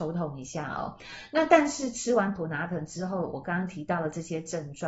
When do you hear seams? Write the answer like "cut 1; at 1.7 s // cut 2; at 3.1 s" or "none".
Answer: none

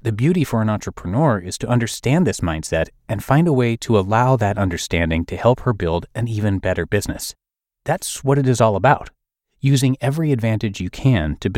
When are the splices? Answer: none

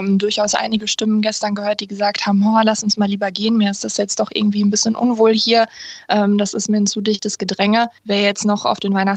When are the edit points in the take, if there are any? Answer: cut 1; at 8.0 s

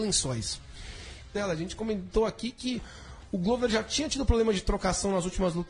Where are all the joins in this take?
cut 1; at 1.4 s

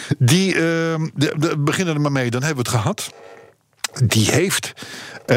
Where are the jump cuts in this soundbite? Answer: none

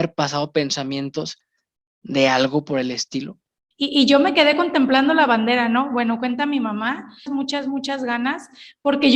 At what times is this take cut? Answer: cut 1; at 3.7 s // cut 2; at 7.3 s

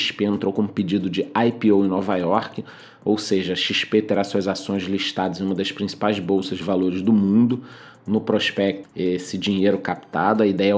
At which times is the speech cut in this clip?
cut 1; at 8.8 s

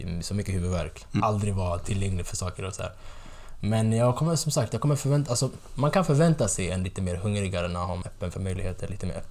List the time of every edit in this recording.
cut 1; at 1.2 s // cut 2; at 8.0 s

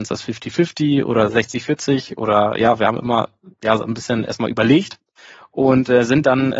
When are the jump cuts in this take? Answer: none

